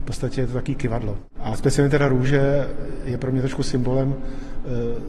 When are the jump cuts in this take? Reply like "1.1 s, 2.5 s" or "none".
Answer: 1.4 s